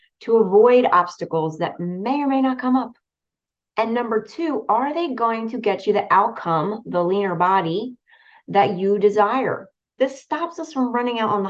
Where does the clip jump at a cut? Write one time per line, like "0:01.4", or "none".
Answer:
0:03.7
0:10.0